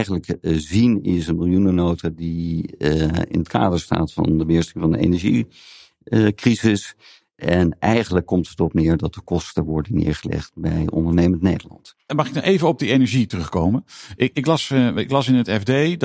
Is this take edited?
no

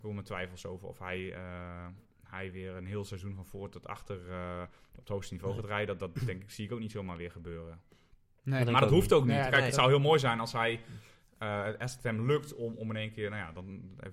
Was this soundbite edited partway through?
no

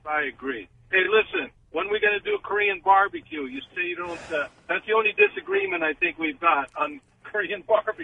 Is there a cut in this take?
no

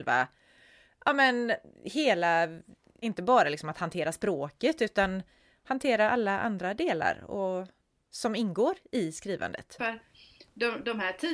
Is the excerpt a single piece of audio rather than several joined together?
no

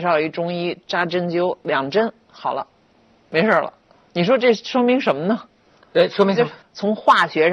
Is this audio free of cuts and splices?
no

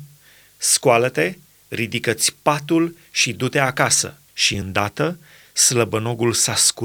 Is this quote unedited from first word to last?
no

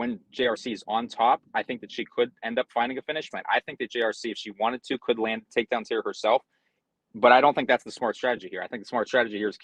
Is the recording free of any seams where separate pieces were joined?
no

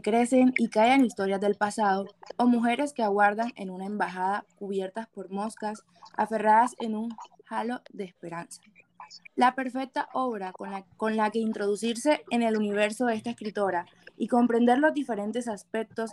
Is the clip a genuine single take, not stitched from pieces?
no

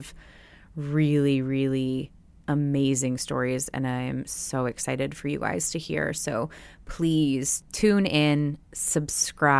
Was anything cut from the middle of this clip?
no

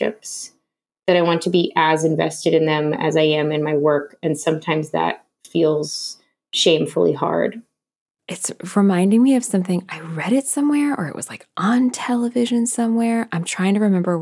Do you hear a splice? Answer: no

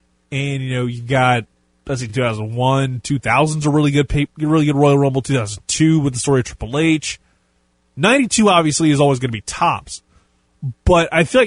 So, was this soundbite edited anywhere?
no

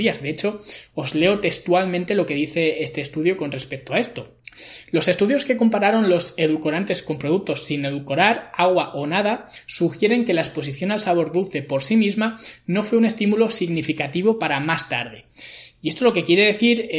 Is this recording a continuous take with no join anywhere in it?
yes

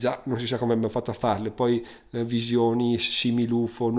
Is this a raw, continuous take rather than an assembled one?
yes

